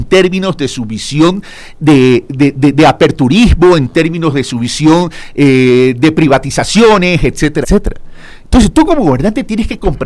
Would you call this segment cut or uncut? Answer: cut